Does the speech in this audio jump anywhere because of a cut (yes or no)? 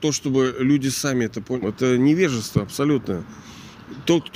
yes